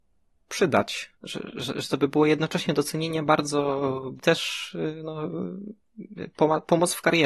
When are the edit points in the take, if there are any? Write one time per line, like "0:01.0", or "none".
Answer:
0:01.1
0:04.2